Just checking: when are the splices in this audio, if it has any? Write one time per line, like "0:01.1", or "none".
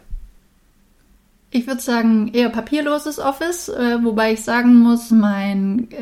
none